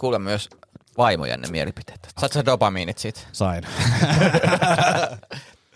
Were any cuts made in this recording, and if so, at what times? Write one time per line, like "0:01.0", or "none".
0:02.2